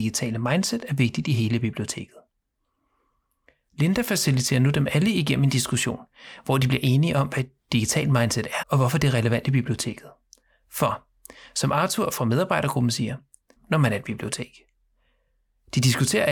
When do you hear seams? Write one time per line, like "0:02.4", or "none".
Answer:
0:08.6
0:13.6